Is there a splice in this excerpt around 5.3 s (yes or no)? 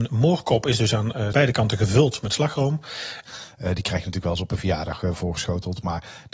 no